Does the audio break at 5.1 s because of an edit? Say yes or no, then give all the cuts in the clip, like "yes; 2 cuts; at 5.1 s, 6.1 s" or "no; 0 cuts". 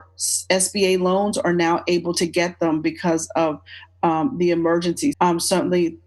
yes; 1 cut; at 5.1 s